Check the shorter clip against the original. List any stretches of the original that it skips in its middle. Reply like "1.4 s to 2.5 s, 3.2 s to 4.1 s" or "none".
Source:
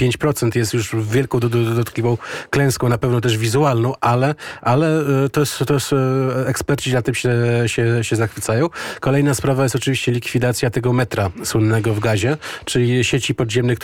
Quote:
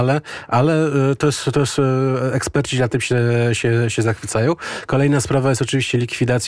none